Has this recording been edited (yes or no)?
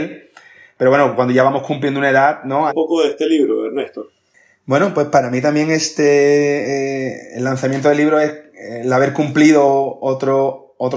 yes